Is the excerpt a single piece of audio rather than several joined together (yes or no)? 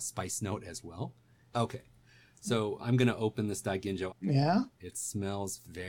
no